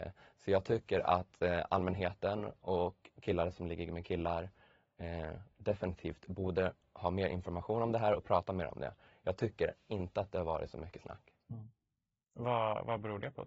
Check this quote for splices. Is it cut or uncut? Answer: uncut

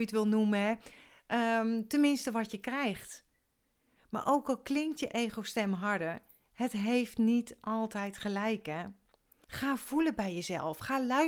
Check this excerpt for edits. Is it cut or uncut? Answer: cut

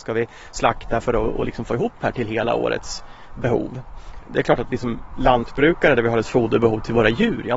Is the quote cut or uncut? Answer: uncut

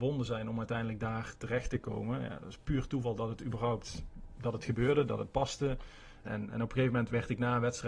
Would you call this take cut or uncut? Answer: cut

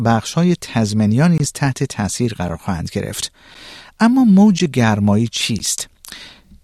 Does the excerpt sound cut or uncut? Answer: uncut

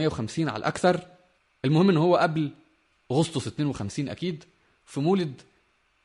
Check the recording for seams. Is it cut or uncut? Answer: uncut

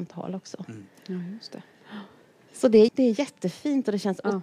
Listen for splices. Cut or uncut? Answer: cut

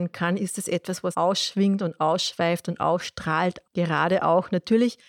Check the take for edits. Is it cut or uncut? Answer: cut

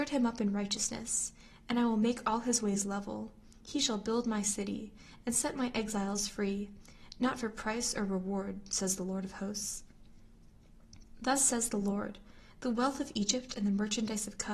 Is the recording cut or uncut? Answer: uncut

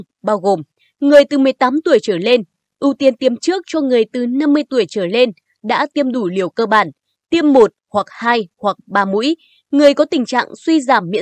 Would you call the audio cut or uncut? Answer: cut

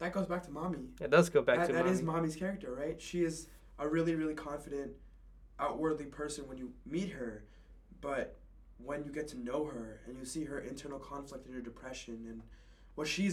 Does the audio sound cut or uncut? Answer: uncut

